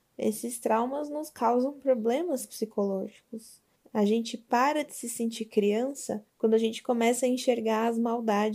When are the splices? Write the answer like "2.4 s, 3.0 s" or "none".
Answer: 3.8 s, 6.3 s